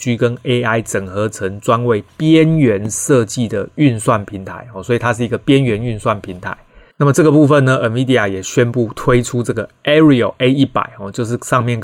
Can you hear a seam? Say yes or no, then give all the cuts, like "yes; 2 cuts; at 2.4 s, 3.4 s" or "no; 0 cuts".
yes; 1 cut; at 6.9 s